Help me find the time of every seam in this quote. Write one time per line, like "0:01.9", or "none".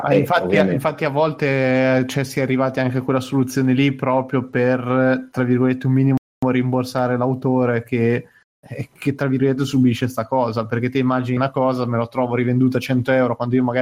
0:11.4